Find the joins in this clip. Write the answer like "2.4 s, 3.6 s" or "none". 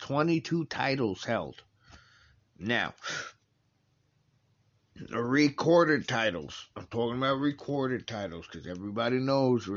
2.4 s